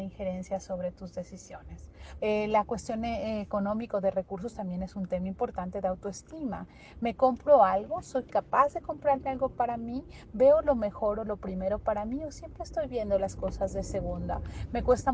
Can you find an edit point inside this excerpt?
yes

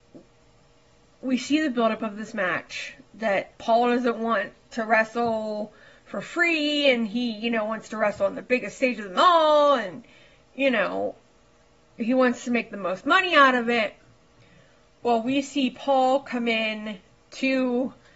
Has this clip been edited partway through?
yes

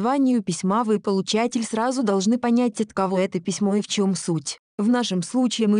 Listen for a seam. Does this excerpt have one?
no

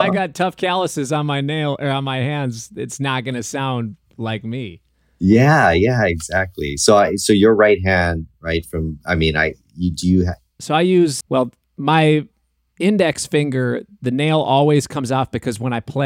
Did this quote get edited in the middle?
yes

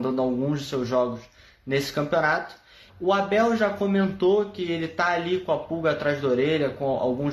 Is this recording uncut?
no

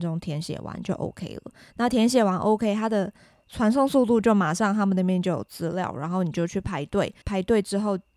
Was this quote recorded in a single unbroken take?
no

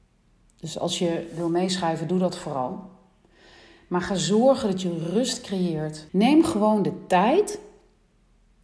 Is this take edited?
yes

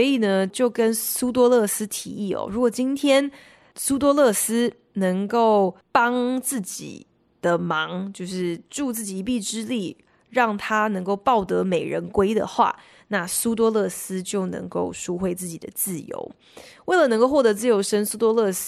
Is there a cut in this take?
yes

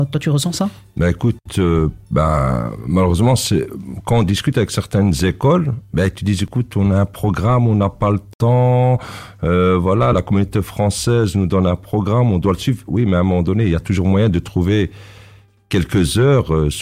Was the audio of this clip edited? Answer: no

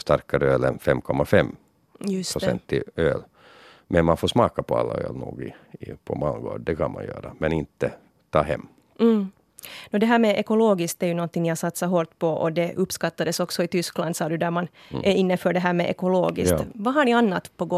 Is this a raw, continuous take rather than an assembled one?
yes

